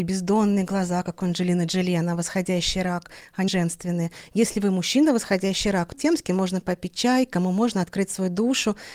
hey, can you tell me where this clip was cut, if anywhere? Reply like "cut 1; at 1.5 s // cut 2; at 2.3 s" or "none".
cut 1; at 3.5 s // cut 2; at 5.9 s